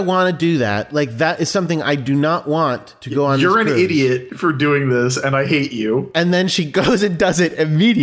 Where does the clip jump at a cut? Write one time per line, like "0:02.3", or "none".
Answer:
none